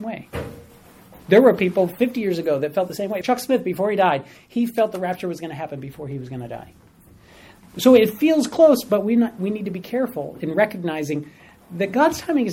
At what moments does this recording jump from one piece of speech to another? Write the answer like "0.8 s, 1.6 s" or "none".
3.2 s